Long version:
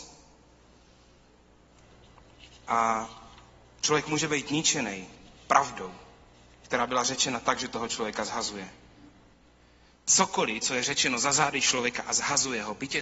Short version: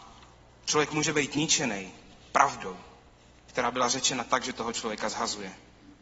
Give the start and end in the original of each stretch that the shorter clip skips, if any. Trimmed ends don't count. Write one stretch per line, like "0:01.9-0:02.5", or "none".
none